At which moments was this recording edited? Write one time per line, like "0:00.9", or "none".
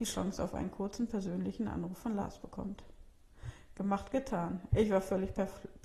0:04.7